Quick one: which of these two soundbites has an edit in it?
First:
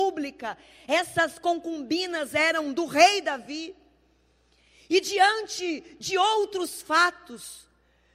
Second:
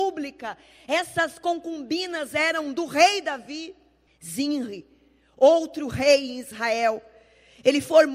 second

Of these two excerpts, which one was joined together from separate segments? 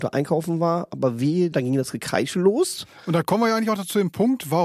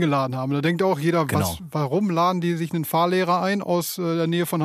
first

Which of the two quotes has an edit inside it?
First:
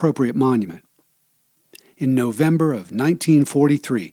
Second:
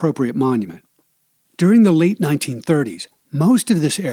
second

